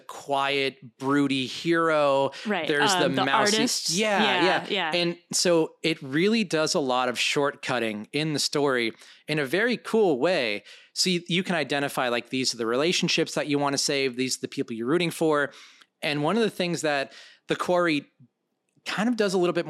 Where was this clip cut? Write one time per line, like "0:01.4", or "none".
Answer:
none